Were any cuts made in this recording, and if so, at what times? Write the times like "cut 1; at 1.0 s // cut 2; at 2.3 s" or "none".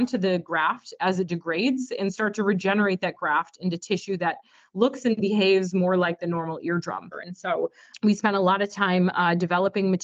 cut 1; at 7.1 s